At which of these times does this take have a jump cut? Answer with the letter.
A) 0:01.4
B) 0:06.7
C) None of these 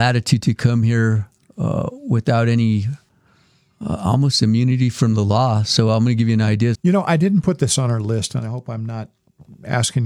B